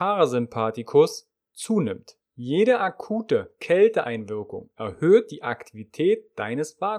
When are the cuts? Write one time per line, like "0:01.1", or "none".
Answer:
0:02.2